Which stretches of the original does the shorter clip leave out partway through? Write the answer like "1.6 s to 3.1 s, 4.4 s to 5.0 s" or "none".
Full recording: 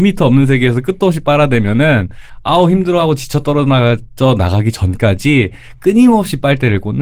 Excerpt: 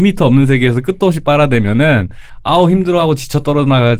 none